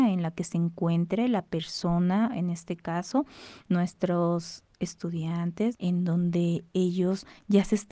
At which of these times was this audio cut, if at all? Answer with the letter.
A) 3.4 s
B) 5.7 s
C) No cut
B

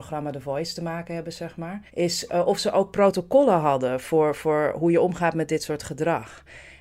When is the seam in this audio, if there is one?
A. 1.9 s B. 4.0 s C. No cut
A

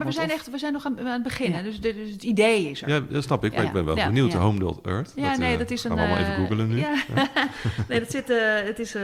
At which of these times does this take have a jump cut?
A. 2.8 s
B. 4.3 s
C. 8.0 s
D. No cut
D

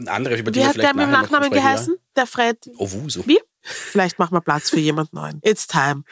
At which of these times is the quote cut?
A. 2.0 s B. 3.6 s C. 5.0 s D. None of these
B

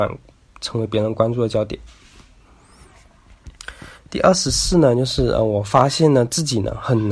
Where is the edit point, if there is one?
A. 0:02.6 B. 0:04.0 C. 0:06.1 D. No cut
B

